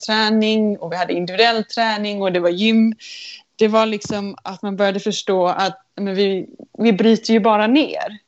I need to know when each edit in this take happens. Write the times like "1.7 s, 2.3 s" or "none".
none

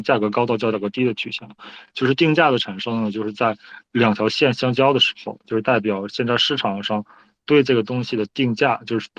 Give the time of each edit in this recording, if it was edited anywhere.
none

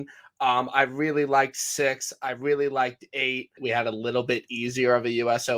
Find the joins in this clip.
3.6 s

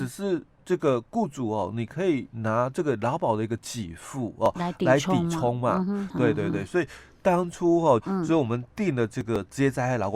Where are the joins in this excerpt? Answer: 6.1 s, 8.0 s

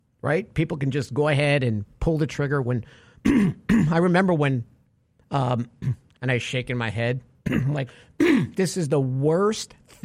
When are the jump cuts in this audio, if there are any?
6.1 s, 7.9 s

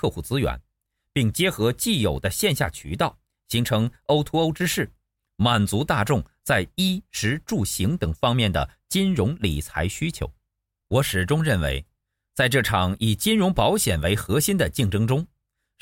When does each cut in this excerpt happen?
10.8 s

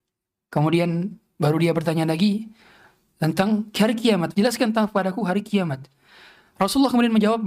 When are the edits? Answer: 4.3 s

